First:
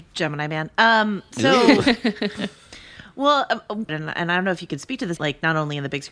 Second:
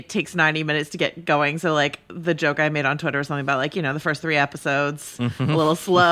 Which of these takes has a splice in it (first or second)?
first